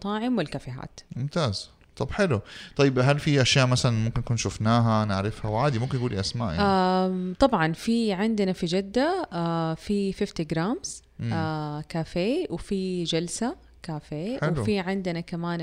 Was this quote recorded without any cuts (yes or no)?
yes